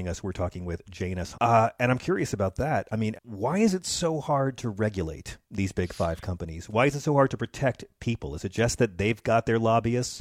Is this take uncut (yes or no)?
no